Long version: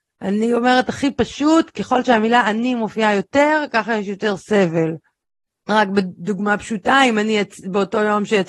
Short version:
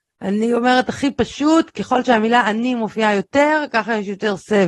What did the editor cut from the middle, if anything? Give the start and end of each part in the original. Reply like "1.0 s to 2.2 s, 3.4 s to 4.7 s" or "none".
none